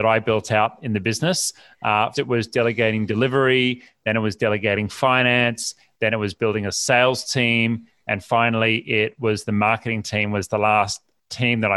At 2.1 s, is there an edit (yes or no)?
yes